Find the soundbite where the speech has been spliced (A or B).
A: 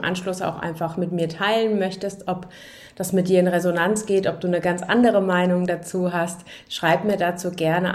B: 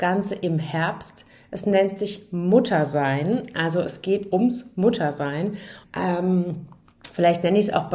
B